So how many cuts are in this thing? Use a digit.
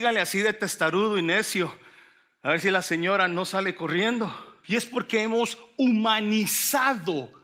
1